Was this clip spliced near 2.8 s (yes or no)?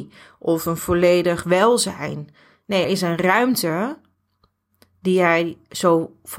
yes